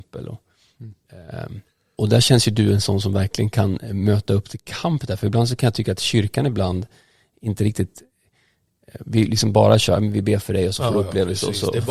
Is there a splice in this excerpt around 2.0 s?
yes; 1 cut; at 2.0 s

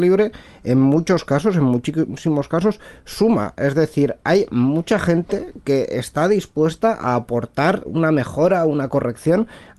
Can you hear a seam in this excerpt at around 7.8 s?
yes; 1 cut; at 7.8 s

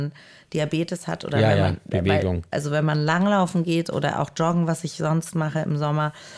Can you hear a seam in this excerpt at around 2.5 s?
yes; 1 cut; at 2.5 s

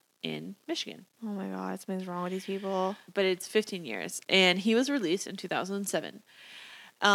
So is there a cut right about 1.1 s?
no; 1 cut; at 3.0 s

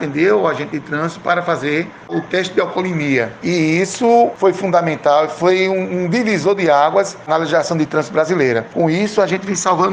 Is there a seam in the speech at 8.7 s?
no; 0 cuts

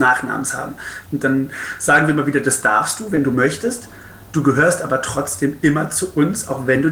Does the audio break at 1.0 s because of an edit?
yes; 1 cut; at 1.0 s

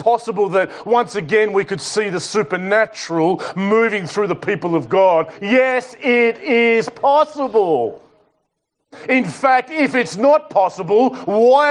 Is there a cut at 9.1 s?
no; 0 cuts

